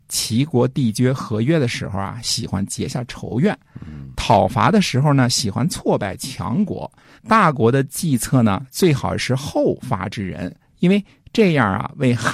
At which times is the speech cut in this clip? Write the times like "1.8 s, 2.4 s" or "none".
7.2 s, 10.7 s